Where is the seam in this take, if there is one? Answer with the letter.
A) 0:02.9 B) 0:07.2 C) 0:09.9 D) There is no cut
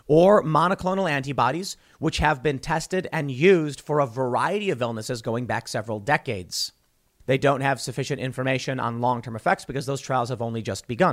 B